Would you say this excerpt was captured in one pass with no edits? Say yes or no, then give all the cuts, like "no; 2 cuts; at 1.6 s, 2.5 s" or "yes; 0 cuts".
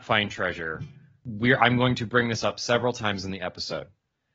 yes; 0 cuts